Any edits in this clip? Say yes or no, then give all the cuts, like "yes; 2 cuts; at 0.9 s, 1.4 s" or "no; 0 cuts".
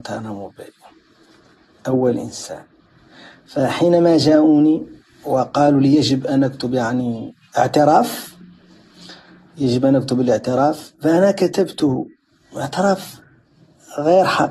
no; 0 cuts